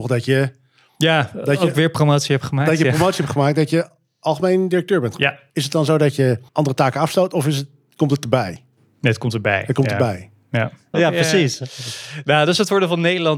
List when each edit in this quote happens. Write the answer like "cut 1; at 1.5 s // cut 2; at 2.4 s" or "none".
cut 1; at 6.5 s // cut 2; at 10.9 s